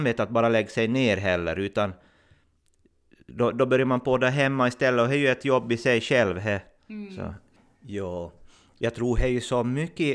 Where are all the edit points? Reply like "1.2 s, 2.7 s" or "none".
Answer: 7.7 s